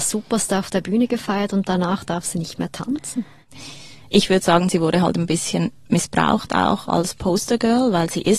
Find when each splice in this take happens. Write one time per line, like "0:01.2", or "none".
none